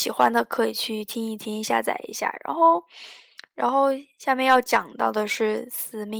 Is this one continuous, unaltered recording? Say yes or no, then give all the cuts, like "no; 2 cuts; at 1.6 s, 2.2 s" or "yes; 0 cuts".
yes; 0 cuts